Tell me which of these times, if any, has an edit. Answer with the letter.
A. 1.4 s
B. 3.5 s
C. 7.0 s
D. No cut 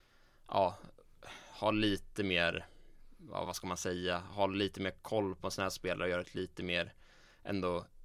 D